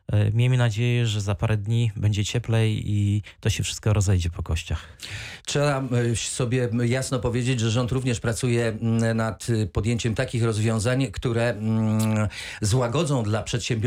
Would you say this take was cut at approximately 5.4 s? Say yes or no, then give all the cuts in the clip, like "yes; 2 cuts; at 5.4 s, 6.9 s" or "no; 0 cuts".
no; 0 cuts